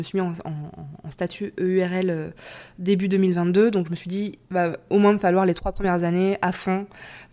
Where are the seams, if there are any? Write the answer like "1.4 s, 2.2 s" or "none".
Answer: none